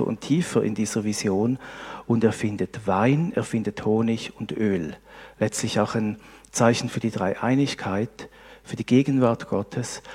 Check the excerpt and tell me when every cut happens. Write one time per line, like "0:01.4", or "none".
none